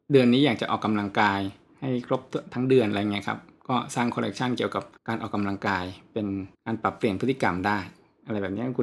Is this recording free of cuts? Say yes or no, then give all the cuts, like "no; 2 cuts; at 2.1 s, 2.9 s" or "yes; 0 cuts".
no; 2 cuts; at 5.0 s, 6.5 s